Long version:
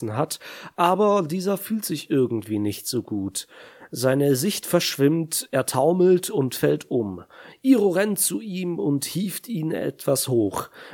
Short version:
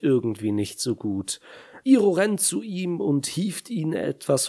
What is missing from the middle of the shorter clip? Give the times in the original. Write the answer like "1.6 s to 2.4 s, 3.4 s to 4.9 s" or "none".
3.9 s to 7.6 s